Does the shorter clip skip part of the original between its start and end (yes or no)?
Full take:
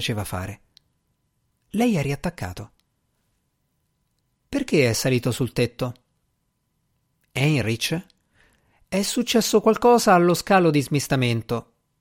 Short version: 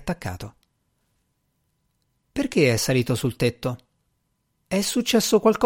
yes